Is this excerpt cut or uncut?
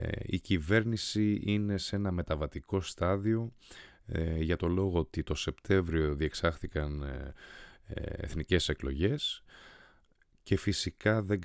uncut